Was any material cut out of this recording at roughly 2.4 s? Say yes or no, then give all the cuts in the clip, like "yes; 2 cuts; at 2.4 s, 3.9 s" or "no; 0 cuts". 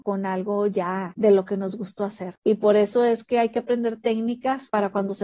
yes; 1 cut; at 2.4 s